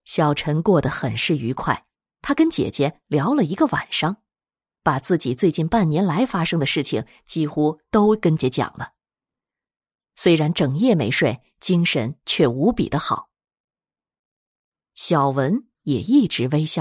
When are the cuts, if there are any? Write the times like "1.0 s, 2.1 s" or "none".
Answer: 8.4 s, 14.7 s